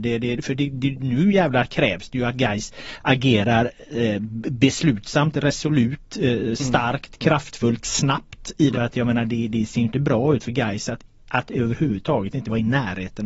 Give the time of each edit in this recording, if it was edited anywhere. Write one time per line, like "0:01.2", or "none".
0:06.6
0:08.7